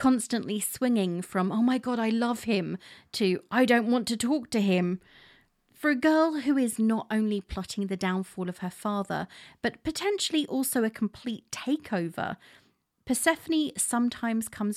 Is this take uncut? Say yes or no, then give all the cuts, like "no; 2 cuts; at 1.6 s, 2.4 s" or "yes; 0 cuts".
yes; 0 cuts